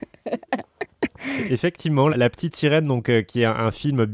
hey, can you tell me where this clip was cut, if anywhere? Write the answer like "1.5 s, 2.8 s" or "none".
2.1 s